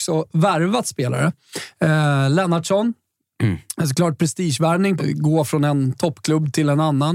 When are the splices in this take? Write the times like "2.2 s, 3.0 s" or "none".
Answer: 5.0 s